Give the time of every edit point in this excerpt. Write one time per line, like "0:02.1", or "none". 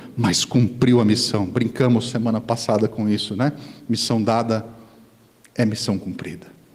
none

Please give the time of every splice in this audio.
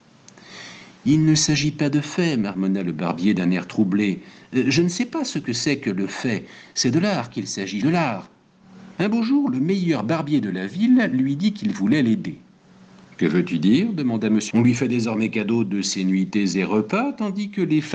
0:07.8
0:09.0
0:14.5

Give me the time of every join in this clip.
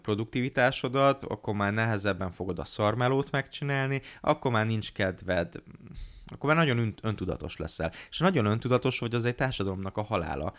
none

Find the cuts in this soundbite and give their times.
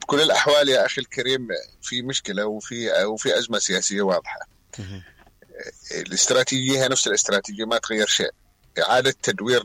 none

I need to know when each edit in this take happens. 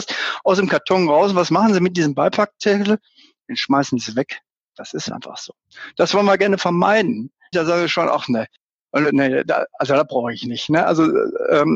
0:07.5

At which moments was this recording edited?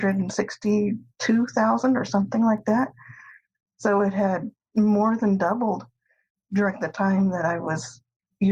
none

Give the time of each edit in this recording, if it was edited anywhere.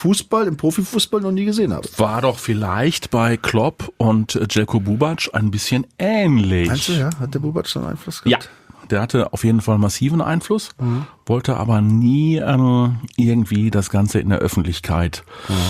none

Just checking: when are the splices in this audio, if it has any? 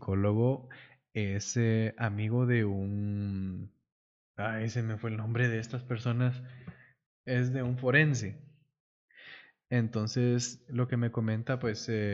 none

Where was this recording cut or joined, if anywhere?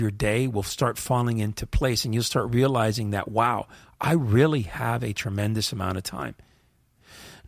none

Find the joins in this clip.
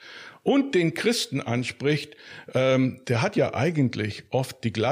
0:03.0

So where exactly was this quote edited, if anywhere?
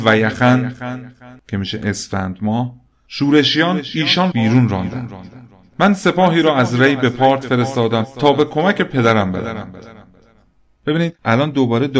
0:04.3

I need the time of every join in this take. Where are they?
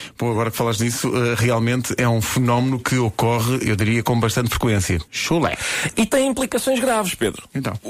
0:05.1

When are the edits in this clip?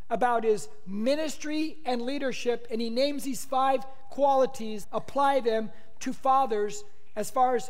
0:04.8

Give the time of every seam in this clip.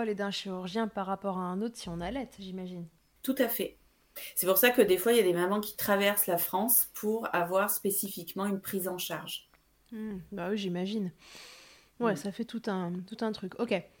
none

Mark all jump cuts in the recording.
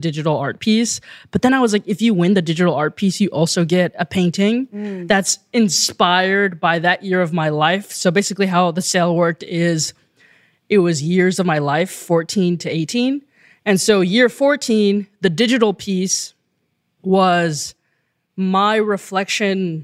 none

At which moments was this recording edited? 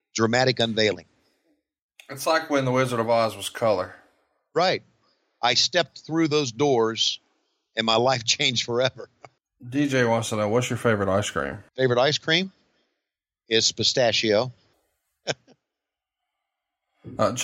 0:09.4
0:11.7
0:14.7

